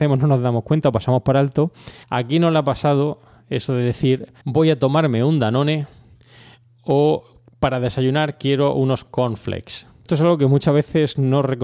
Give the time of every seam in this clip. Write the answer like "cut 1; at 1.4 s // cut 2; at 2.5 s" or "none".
cut 1; at 2.0 s // cut 2; at 4.4 s // cut 3; at 10.1 s